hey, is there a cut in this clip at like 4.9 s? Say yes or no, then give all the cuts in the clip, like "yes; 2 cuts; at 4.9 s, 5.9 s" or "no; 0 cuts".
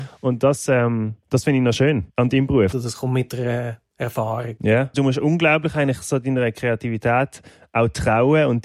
yes; 2 cuts; at 2.7 s, 4.9 s